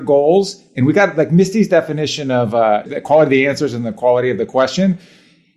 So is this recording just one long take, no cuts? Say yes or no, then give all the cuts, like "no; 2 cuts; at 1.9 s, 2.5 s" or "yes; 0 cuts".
no; 1 cut; at 2.9 s